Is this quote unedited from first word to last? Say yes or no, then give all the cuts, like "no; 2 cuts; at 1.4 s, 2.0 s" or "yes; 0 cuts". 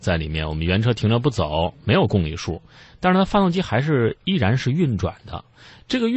yes; 0 cuts